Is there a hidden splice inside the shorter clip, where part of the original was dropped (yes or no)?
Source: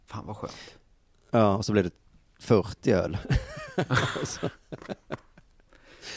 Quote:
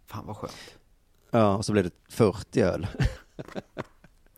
yes